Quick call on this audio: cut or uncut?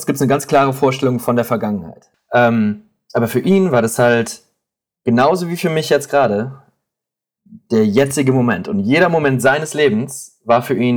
cut